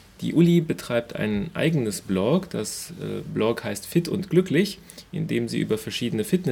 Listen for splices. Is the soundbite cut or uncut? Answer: uncut